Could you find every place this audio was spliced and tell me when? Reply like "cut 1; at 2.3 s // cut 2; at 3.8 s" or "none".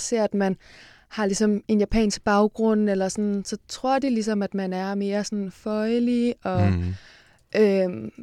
none